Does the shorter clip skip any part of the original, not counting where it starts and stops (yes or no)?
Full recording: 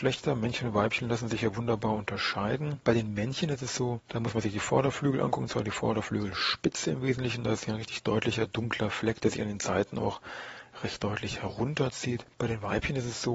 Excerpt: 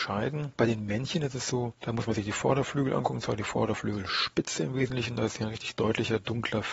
no